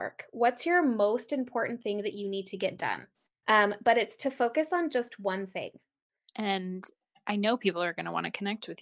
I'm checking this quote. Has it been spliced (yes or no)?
yes